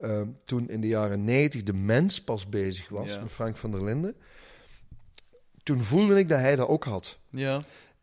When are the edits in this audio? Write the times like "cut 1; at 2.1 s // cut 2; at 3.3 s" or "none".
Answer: none